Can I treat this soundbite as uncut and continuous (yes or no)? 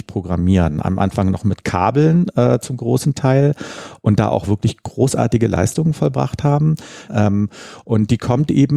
no